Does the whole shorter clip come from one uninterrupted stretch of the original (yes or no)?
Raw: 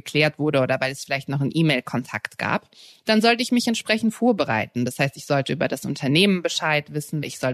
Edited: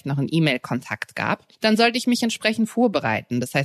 no